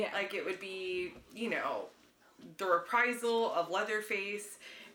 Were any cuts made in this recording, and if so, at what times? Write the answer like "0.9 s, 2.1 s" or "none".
none

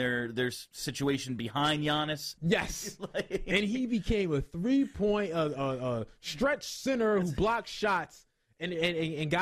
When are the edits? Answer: 2.4 s

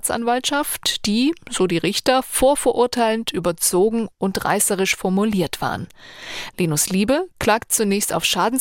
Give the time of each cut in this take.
6.5 s

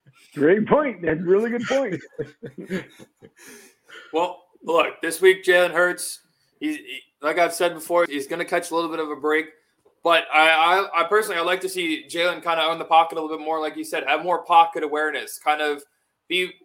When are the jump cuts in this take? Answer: 8.1 s

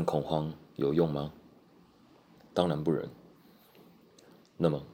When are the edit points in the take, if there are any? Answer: 2.3 s

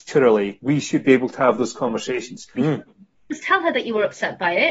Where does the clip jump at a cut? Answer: 2.5 s

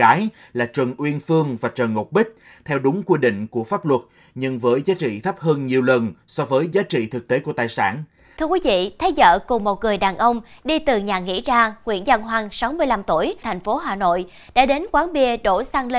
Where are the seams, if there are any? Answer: 8.4 s, 13.4 s

